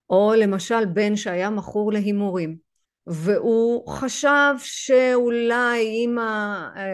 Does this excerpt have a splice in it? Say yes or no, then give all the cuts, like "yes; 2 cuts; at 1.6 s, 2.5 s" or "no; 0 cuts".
yes; 1 cut; at 2.8 s